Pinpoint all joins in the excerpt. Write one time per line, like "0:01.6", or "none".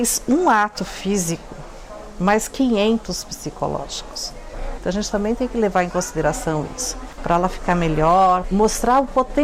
0:04.8
0:07.2
0:08.4